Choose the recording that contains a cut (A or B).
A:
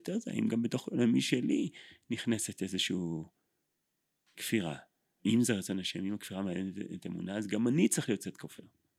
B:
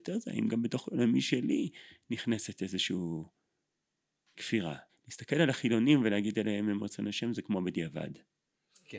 B